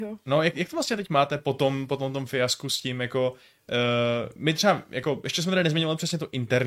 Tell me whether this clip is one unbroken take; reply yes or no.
yes